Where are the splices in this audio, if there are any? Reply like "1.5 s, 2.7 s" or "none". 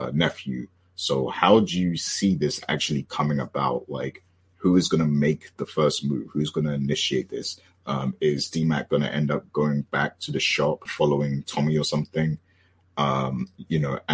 10.9 s